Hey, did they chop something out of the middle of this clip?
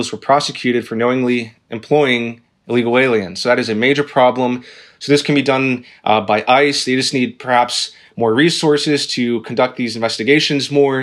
no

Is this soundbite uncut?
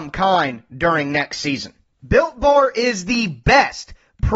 yes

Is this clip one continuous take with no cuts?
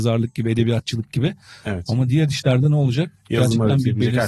yes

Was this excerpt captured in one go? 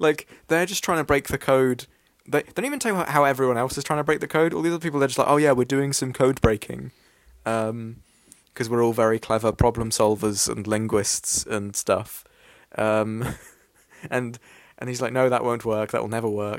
yes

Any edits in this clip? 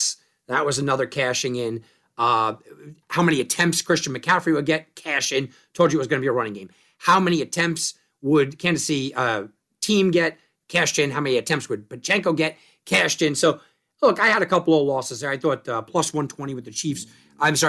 no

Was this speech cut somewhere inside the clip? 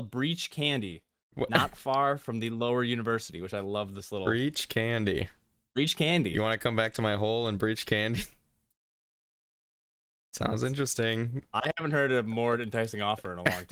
no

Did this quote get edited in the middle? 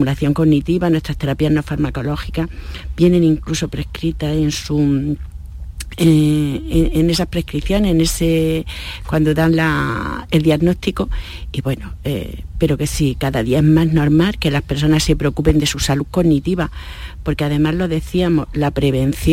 no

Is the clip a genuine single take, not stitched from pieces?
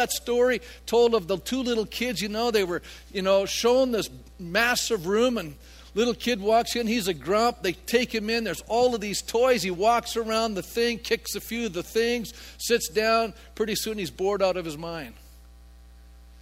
yes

